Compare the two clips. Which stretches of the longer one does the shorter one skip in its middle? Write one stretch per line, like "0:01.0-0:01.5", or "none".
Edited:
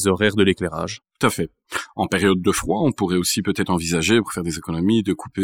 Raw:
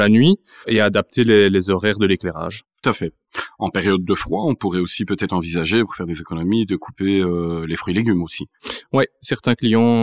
none